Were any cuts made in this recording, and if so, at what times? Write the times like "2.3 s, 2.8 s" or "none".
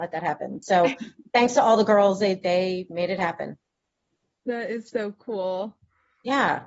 none